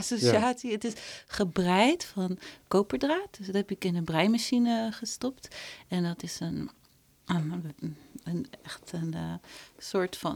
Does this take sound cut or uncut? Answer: uncut